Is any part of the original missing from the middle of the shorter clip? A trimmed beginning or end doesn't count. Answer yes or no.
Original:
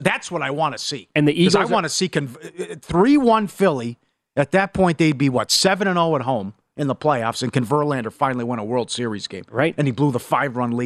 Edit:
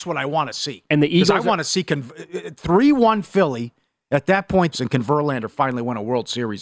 yes